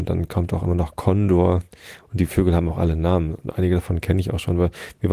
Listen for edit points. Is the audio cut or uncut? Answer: uncut